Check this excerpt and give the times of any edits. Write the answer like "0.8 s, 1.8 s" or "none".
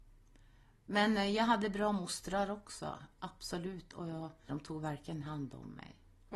4.5 s

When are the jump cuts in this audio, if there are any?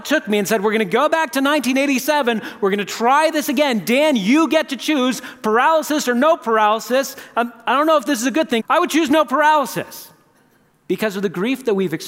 8.6 s

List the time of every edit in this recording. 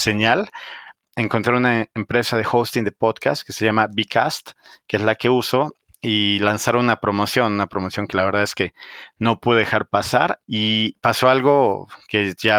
10.4 s

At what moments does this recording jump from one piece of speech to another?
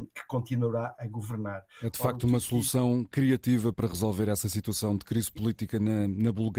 3.7 s

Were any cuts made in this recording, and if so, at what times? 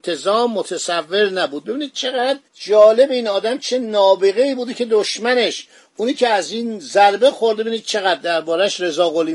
2.4 s

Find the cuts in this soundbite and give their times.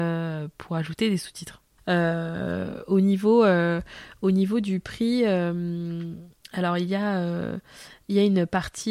1.8 s

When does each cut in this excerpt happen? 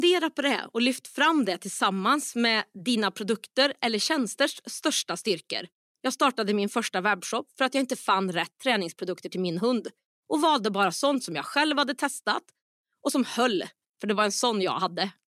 5.9 s, 13.9 s

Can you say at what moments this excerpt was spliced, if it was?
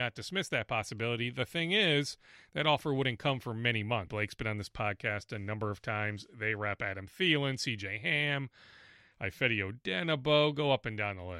4.1 s

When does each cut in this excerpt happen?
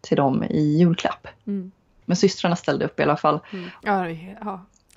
2.0 s, 3.8 s

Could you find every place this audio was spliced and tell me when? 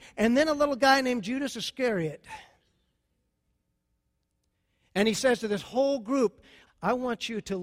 6.7 s

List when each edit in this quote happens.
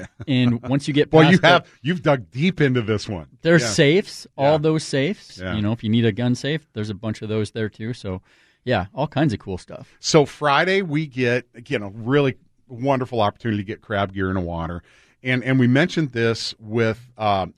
5.3 s

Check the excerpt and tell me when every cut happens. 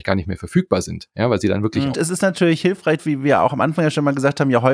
1.9 s, 3.0 s

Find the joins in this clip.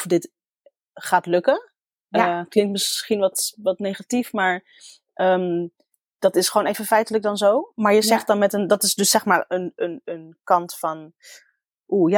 none

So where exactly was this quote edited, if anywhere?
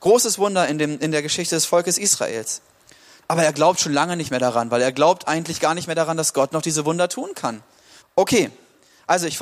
3.2 s, 8.0 s

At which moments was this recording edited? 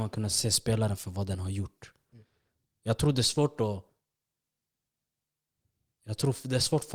none

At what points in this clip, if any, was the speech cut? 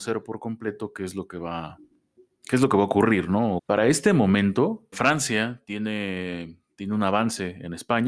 3.6 s, 4.9 s

